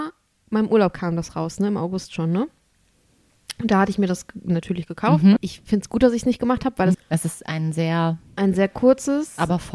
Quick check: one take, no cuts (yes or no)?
no